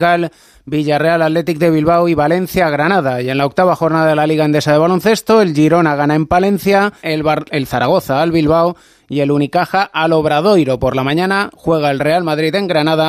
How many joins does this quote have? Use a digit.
1